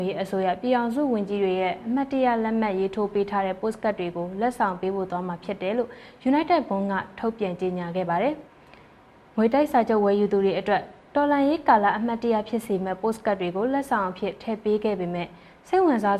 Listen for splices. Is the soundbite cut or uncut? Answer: cut